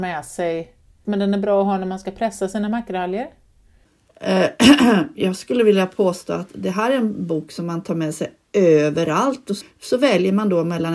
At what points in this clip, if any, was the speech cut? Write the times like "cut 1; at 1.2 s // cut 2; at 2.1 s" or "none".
cut 1; at 1.0 s // cut 2; at 9.6 s

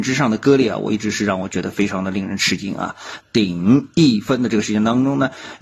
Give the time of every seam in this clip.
cut 1; at 3.2 s

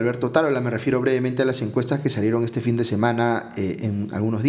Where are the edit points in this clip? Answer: none

